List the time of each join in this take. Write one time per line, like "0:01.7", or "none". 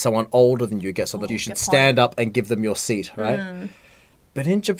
0:01.3